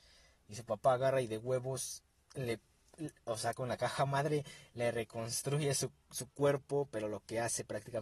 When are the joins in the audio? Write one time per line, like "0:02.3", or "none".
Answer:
none